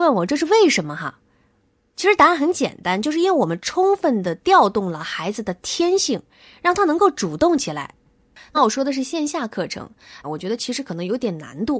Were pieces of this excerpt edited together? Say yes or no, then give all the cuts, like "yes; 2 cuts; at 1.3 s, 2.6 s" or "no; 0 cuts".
yes; 2 cuts; at 8.5 s, 10.2 s